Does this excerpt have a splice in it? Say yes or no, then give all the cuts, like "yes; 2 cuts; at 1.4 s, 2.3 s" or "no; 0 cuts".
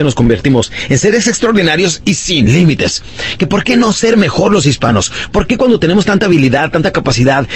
no; 0 cuts